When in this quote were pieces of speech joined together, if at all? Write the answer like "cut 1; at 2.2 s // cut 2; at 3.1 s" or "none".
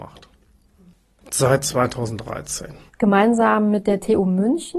cut 1; at 1.2 s // cut 2; at 2.9 s